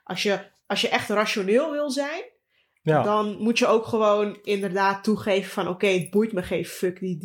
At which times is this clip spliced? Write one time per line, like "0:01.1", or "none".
none